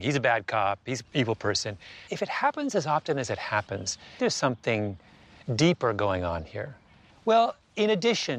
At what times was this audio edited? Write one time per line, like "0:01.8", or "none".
0:02.1
0:04.2
0:07.1